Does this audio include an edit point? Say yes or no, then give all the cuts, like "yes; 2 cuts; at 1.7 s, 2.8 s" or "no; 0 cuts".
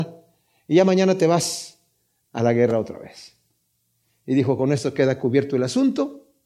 no; 0 cuts